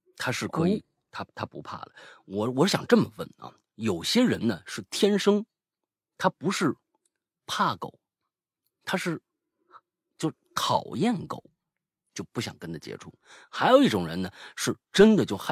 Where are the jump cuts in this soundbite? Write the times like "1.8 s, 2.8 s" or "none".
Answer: none